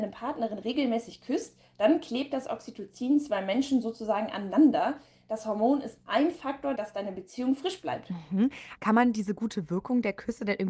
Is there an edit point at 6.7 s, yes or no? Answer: yes